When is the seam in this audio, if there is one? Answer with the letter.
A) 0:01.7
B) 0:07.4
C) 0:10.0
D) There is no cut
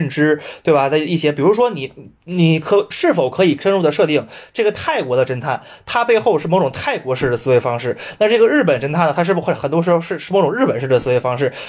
D